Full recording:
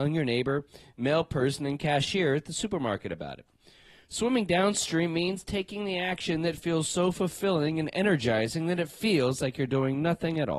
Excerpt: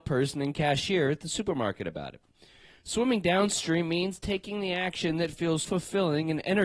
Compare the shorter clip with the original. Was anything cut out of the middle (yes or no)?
yes